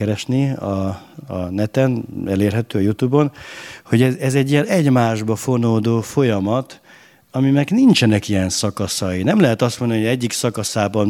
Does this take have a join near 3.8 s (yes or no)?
no